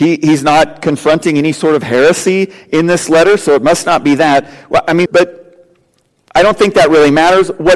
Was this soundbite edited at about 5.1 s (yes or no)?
yes